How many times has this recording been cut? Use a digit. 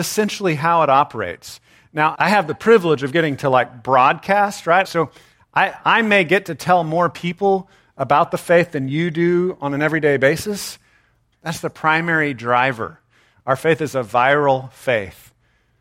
3